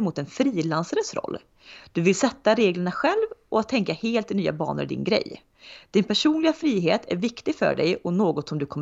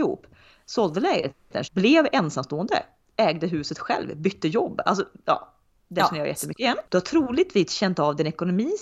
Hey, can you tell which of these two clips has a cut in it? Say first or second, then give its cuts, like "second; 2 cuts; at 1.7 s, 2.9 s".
second; 2 cuts; at 1.6 s, 6.8 s